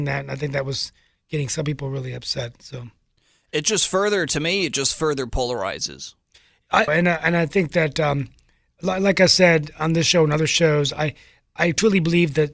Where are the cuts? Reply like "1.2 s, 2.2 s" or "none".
6.9 s